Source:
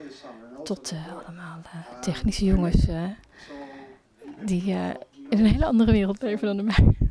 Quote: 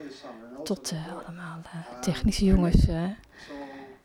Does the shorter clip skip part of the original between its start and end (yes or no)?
no